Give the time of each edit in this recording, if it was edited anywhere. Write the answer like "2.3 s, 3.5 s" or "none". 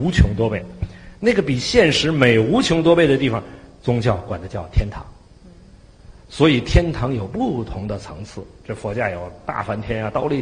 6.2 s

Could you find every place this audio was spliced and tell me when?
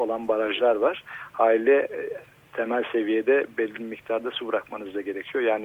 none

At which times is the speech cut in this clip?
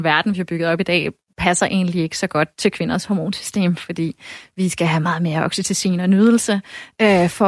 none

